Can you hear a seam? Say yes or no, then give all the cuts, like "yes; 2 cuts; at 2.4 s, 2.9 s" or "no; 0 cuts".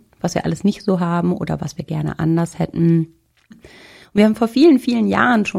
yes; 1 cut; at 3.5 s